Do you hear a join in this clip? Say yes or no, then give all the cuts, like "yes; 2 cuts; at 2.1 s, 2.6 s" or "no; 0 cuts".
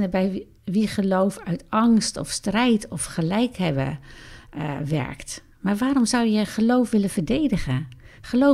no; 0 cuts